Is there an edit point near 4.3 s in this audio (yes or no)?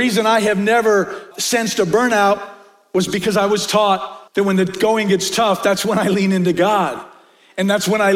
yes